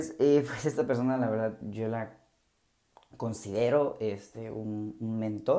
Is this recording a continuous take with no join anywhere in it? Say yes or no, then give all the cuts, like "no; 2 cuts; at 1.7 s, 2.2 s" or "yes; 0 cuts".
yes; 0 cuts